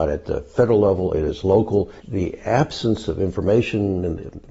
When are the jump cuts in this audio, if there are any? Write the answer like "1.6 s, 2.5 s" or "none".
none